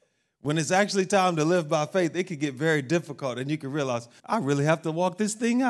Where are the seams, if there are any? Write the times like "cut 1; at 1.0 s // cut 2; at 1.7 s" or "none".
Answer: cut 1; at 4.2 s